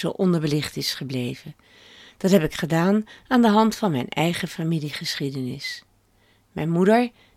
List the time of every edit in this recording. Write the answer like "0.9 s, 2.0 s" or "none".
none